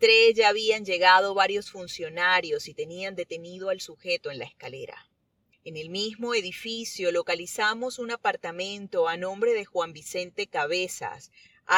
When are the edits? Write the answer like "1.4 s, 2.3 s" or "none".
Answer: 5.5 s